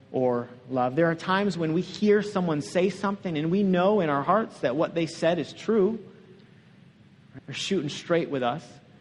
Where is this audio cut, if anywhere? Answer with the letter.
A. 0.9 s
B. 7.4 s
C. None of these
B